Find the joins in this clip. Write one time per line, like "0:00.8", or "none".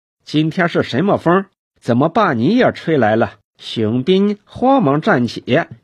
0:03.5